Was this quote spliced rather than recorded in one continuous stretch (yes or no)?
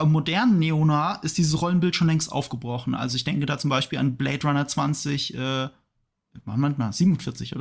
no